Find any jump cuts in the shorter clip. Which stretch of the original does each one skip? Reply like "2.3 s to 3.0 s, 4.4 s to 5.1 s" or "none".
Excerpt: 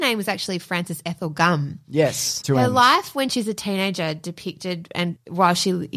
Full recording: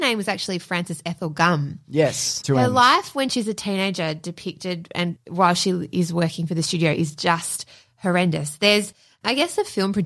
none